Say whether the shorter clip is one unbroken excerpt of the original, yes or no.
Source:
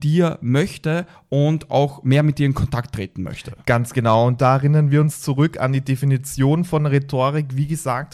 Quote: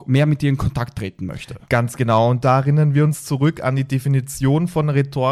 yes